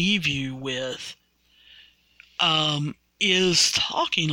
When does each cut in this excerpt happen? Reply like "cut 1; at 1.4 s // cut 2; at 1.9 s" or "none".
none

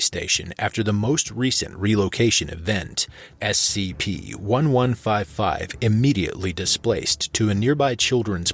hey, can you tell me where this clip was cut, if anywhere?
cut 1; at 3.4 s

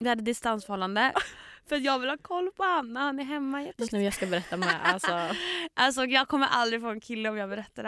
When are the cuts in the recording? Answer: cut 1; at 1.1 s // cut 2; at 3.9 s

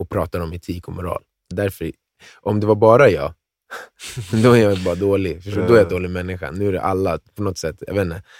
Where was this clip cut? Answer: cut 1; at 1.5 s

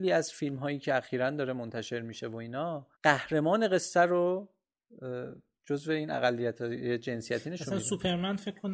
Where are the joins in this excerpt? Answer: cut 1; at 2.9 s

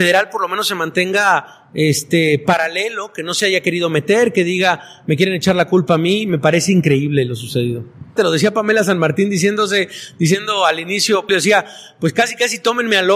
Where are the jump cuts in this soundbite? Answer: cut 1; at 8.2 s // cut 2; at 11.3 s

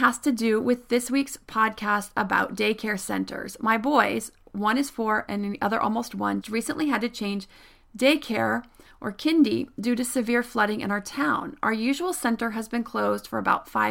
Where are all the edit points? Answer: cut 1; at 6.4 s

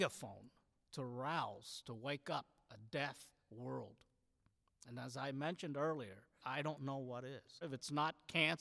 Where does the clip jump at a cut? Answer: cut 1; at 6.4 s // cut 2; at 7.6 s

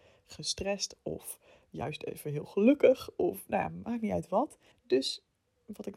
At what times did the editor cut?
cut 1; at 4.7 s

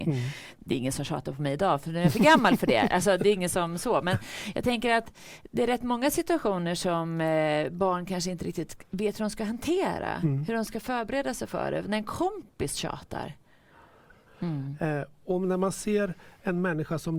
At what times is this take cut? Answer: cut 1; at 14.2 s

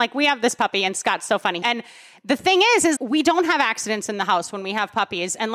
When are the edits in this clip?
cut 1; at 1.6 s // cut 2; at 3.0 s

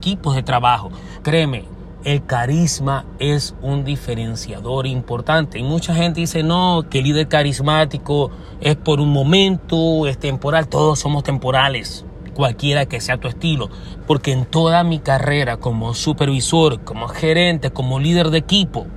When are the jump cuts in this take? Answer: cut 1; at 1.2 s // cut 2; at 6.9 s // cut 3; at 14.0 s

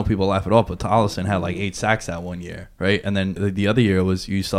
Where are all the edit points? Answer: cut 1; at 3.4 s

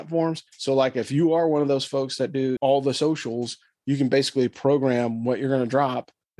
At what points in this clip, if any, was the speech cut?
cut 1; at 2.6 s

